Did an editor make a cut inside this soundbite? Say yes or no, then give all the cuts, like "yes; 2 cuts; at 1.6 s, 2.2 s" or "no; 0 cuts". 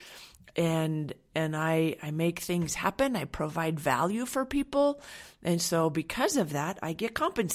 no; 0 cuts